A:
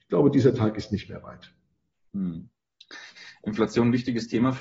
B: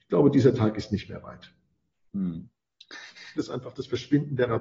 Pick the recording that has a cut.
B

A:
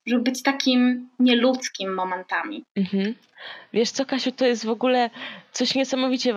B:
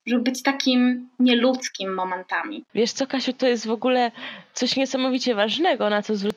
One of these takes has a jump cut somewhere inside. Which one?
B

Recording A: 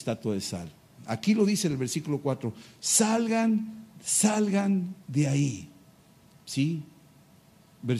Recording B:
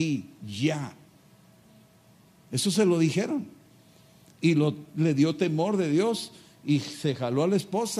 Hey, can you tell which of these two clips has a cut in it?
A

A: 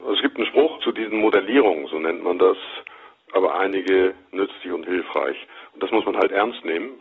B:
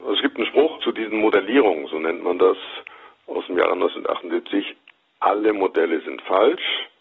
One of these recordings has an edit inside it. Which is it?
A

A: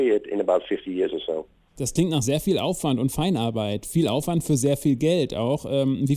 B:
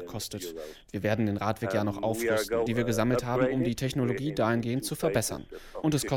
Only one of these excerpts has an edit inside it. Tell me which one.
B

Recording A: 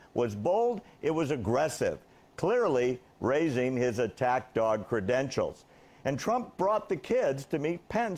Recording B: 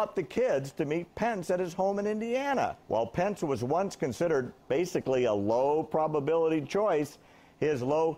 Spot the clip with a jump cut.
B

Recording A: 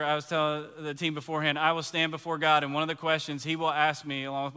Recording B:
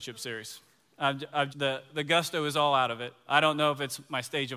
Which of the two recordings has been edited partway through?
B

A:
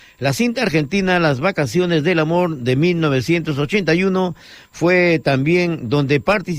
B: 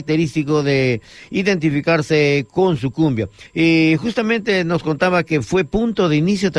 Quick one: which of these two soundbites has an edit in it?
B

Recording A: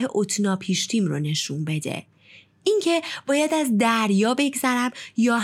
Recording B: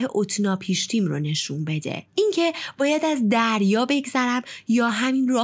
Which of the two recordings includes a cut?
B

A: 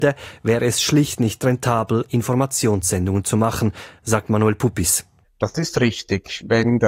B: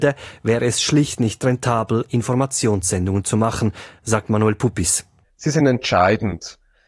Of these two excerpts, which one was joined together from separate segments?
A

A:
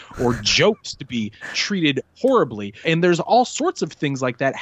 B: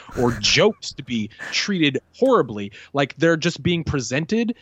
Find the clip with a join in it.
A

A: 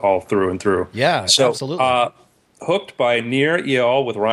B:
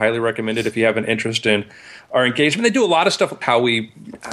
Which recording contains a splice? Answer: B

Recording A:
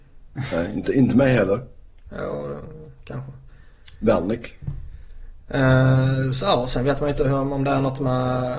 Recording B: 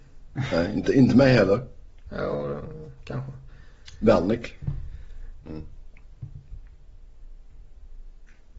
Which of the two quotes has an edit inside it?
B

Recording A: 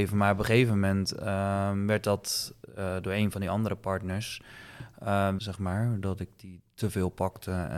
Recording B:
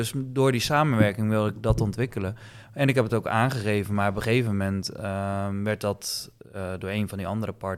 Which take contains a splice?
A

